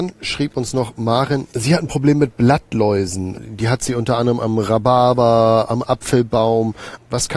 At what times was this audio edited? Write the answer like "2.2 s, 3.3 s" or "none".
1.5 s